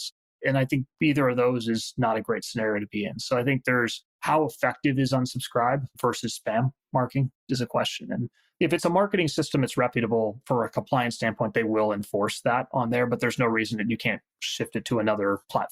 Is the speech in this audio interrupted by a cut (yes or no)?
no